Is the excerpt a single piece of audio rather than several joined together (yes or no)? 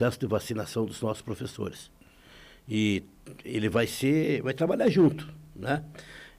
yes